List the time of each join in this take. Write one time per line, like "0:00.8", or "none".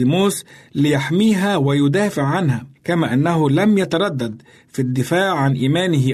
0:02.8